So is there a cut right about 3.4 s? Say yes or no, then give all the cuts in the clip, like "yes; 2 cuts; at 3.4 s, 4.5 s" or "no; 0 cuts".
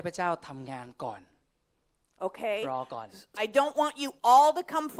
yes; 1 cut; at 3.4 s